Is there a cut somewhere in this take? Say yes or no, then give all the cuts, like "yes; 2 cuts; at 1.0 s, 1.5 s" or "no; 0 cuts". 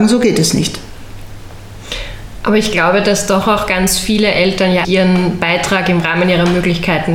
yes; 1 cut; at 4.8 s